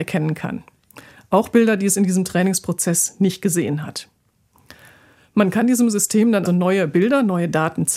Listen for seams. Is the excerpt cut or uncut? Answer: cut